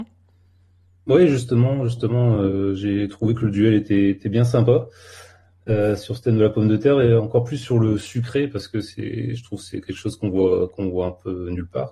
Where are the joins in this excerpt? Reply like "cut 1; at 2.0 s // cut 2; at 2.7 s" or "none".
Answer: none

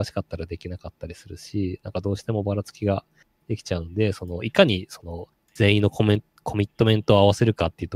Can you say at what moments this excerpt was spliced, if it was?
none

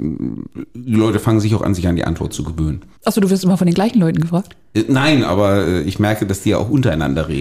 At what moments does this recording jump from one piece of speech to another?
cut 1; at 3.0 s

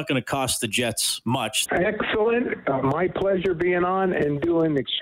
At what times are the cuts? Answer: cut 1; at 1.7 s

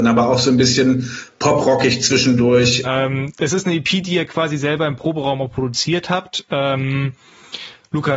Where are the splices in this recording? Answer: cut 1; at 2.8 s

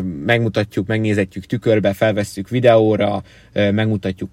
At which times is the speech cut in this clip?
none

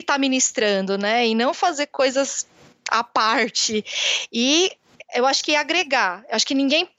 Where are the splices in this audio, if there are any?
none

